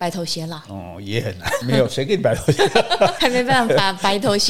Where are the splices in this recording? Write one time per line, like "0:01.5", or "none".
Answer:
0:01.6
0:03.2